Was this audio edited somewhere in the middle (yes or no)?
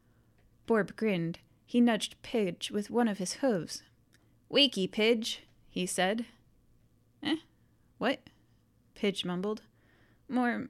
no